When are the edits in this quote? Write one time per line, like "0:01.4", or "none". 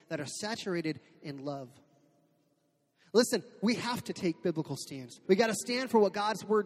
0:05.2